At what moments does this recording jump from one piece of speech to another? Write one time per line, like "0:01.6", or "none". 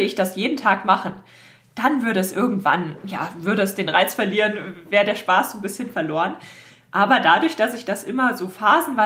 none